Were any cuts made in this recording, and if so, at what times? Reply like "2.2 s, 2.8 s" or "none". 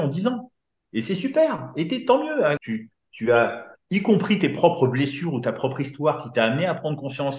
2.6 s

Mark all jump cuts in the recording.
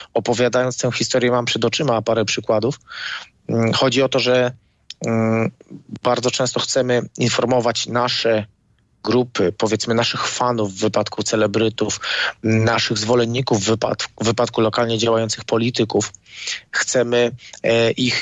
none

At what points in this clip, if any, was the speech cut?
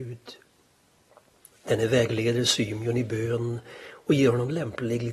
none

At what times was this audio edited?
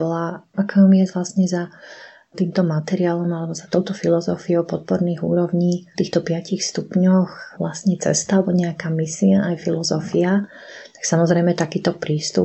none

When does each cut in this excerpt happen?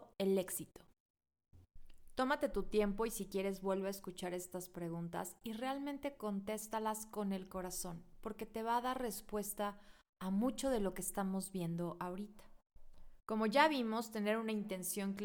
none

